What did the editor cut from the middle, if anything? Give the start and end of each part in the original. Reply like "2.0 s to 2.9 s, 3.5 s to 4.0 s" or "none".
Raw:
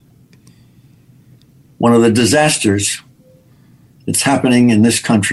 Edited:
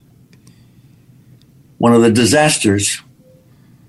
none